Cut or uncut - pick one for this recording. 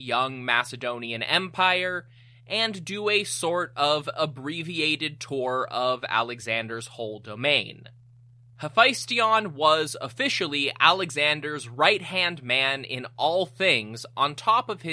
cut